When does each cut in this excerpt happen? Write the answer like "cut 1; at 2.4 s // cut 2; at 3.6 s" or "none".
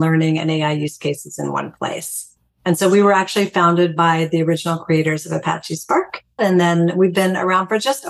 cut 1; at 6.4 s

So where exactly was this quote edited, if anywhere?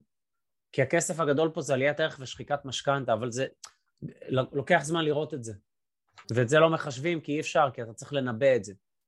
cut 1; at 6.2 s

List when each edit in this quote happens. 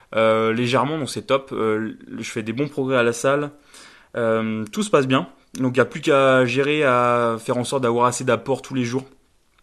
none

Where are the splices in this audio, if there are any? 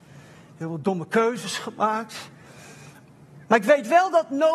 cut 1; at 3.4 s

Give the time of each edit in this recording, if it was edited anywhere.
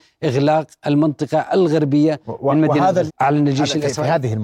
cut 1; at 3.1 s

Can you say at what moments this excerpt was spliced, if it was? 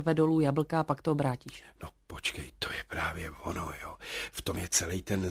none

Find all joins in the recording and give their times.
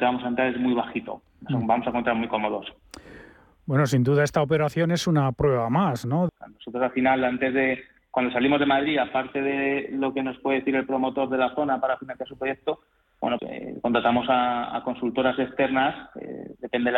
cut 1; at 6.3 s // cut 2; at 13.4 s

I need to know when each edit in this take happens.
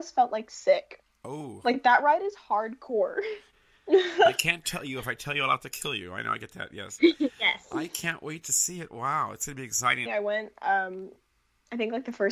cut 1; at 3.5 s // cut 2; at 10.1 s

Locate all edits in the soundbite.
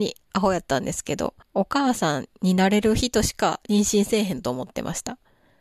cut 1; at 1.4 s

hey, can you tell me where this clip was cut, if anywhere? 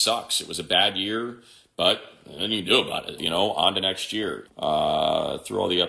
cut 1; at 3.2 s // cut 2; at 4.5 s

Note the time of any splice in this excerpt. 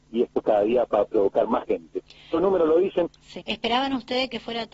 cut 1; at 3.4 s

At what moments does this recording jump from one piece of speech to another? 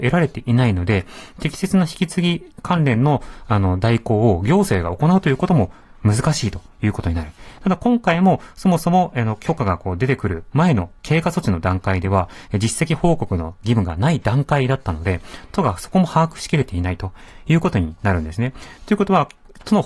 cut 1; at 7.6 s

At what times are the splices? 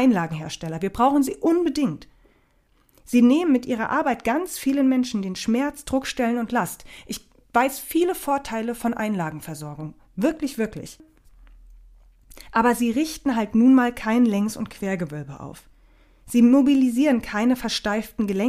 none

